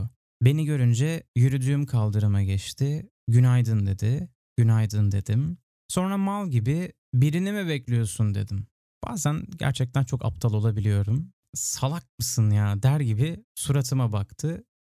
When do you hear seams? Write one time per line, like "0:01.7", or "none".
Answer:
none